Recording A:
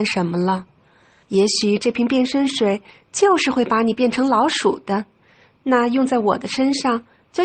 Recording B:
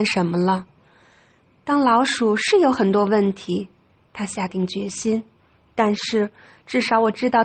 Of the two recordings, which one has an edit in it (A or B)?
A